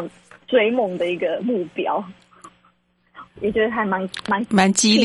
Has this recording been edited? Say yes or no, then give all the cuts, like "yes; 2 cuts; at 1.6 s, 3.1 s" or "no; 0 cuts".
yes; 1 cut; at 3.3 s